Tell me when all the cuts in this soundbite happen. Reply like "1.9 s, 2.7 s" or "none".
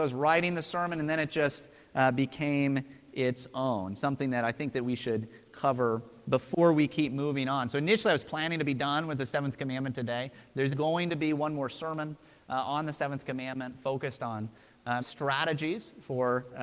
10.7 s, 15.0 s